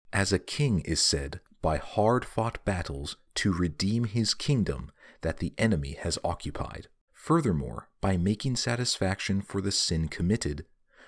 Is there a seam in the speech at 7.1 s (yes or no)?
yes